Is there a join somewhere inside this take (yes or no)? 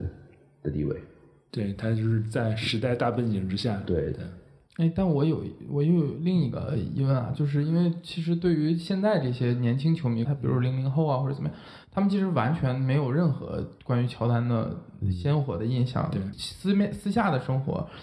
yes